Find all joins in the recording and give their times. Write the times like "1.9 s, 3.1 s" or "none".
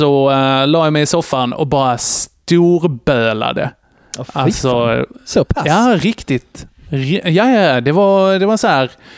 none